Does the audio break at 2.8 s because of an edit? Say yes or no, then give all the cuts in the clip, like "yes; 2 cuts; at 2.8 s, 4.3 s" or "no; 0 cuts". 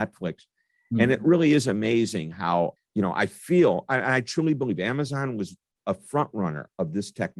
yes; 1 cut; at 2.8 s